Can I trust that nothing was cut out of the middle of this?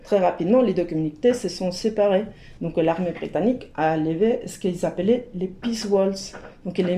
yes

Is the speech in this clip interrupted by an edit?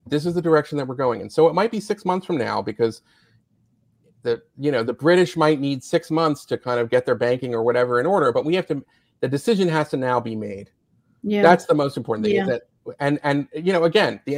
no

